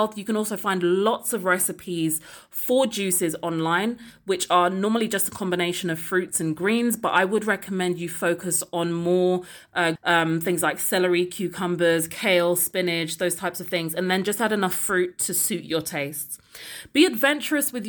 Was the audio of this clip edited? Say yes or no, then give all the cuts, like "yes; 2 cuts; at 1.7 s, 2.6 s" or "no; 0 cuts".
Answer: yes; 1 cut; at 10.0 s